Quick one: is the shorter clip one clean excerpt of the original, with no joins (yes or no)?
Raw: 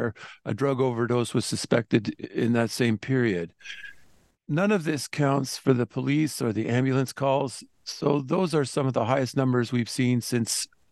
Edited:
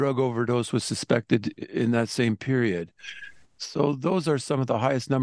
no